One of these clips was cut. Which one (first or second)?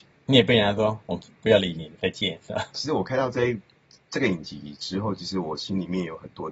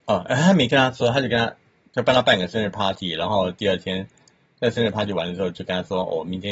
first